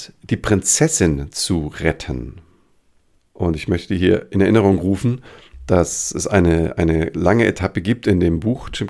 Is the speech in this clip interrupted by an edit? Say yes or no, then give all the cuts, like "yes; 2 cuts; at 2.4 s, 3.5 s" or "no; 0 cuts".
yes; 1 cut; at 3.1 s